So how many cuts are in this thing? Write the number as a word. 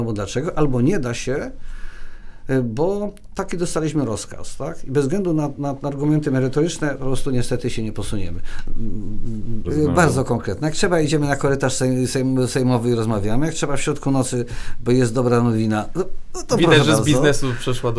one